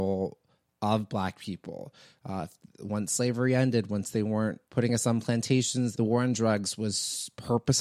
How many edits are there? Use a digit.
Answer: 2